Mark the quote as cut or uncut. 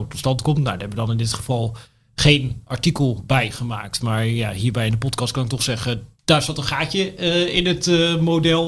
uncut